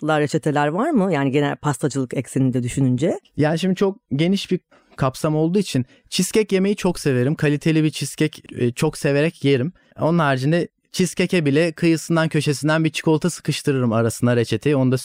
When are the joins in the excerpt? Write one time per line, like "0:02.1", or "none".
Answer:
0:08.5